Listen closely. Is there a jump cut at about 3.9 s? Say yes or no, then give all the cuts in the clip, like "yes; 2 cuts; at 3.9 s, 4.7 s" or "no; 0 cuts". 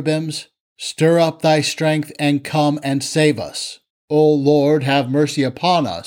yes; 1 cut; at 3.9 s